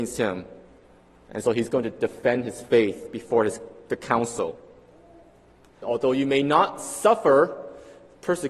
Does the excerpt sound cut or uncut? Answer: cut